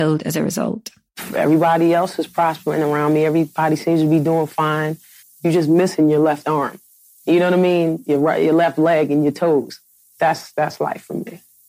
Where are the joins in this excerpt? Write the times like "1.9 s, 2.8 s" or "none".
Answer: 5.2 s